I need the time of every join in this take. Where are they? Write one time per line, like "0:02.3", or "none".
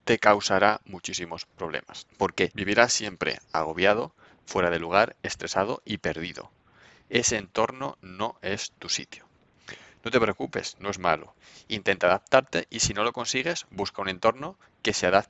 none